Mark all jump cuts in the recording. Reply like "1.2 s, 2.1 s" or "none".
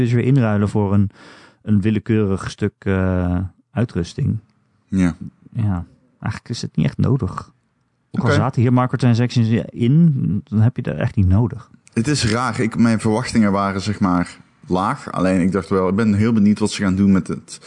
none